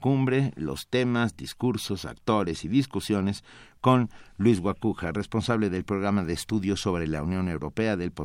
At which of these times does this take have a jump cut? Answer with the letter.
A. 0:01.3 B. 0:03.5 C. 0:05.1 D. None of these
D